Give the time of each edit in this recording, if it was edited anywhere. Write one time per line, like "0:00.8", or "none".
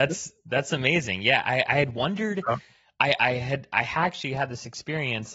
none